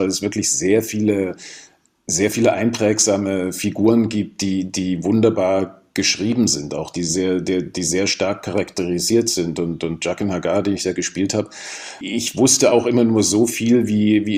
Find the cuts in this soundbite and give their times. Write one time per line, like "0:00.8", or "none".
none